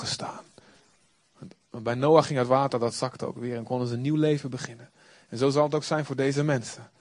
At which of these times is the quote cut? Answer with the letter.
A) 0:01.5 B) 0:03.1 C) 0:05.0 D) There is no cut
D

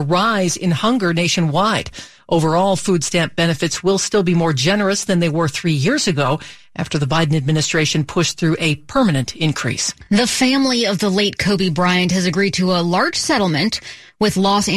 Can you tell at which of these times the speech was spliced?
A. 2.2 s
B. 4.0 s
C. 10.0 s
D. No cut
D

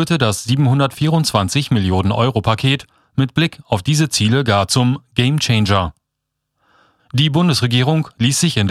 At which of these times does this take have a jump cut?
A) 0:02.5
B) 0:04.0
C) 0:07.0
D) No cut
C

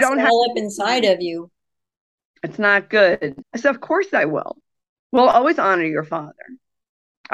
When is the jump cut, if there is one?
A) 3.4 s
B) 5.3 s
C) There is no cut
A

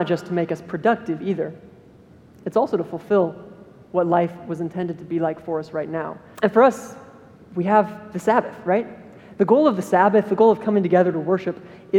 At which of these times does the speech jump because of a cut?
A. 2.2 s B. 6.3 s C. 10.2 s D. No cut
B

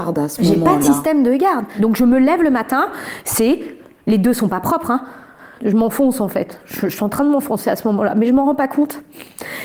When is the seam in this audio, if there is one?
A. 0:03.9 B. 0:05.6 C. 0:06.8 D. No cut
B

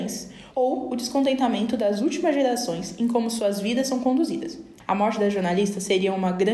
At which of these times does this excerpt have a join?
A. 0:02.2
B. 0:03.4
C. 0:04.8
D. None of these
D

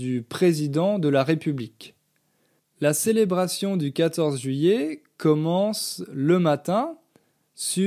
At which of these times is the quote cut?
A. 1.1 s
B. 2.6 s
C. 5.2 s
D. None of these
B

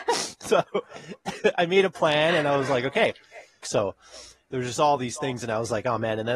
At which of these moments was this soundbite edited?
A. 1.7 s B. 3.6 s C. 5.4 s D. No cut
B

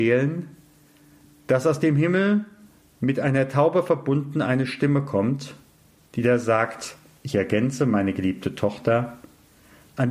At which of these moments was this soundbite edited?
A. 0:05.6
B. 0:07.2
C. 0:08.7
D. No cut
B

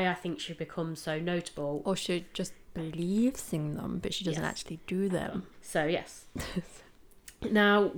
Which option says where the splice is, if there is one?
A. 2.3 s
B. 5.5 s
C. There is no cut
B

